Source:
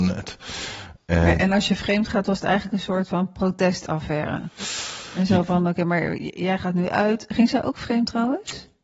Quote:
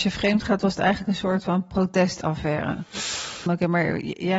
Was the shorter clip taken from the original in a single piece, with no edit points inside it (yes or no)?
no